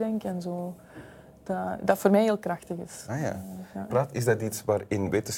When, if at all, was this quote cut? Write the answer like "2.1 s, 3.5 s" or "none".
3.9 s